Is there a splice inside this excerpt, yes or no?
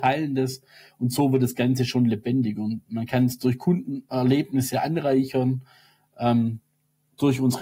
no